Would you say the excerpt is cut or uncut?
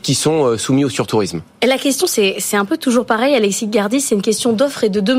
uncut